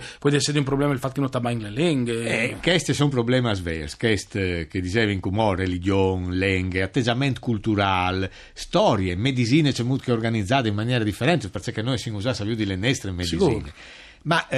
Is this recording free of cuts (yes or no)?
yes